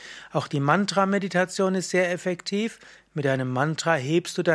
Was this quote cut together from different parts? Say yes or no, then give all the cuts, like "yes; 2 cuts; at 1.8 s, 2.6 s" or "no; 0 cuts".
no; 0 cuts